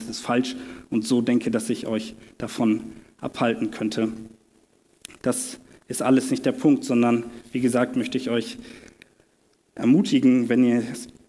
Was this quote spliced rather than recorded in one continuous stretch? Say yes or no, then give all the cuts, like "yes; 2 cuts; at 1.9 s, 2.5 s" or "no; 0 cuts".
no; 0 cuts